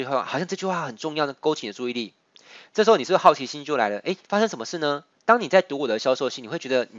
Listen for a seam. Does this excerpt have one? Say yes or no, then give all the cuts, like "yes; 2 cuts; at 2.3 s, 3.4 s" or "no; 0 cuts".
yes; 1 cut; at 5.2 s